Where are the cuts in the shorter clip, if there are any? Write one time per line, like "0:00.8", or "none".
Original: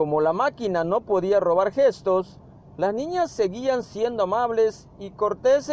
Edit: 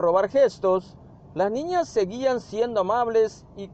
none